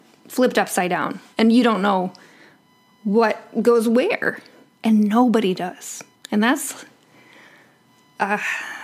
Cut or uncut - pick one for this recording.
cut